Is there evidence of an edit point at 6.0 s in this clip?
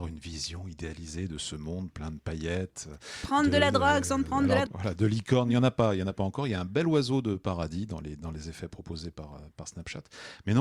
no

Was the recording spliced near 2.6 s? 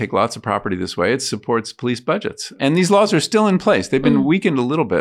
yes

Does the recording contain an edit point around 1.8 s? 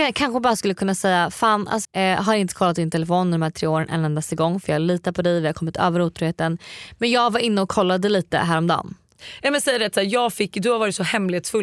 yes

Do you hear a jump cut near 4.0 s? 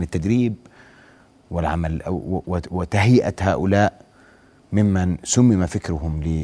no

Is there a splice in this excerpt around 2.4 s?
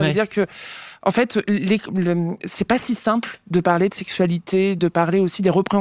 no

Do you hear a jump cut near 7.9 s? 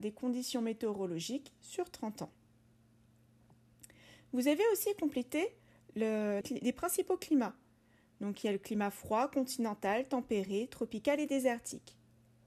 no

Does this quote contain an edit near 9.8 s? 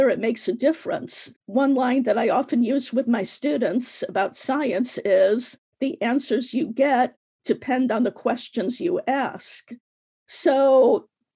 no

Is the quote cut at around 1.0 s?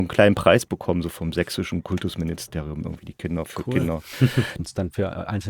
no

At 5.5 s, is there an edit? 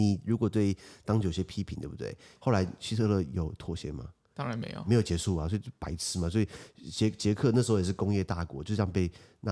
no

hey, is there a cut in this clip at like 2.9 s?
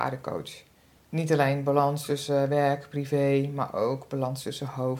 no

